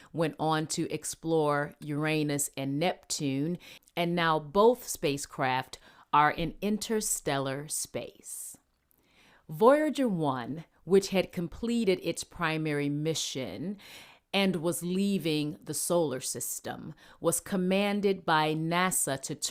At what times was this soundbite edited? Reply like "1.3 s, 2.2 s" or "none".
none